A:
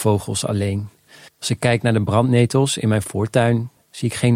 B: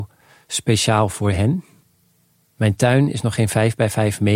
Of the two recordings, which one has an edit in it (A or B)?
A